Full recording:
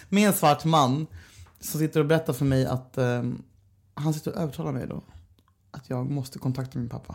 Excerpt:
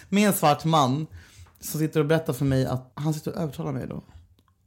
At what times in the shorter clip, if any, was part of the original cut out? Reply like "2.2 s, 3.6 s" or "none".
2.9 s